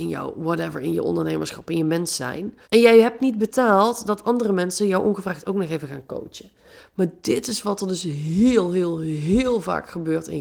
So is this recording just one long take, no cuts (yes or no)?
no